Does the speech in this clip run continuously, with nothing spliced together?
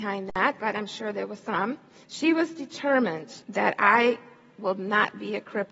no; 2 cuts; at 2.0 s, 3.4 s

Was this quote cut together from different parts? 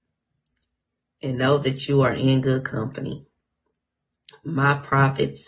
no; 0 cuts

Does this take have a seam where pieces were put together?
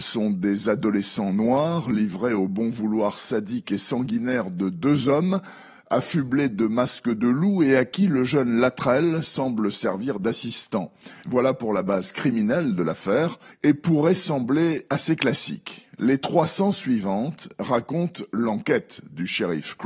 yes; 2 cuts; at 11.2 s, 13.5 s

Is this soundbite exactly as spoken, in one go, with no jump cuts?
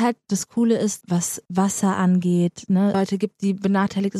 no; 2 cuts; at 1.0 s, 2.9 s

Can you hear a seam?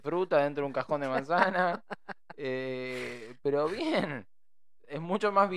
no; 0 cuts

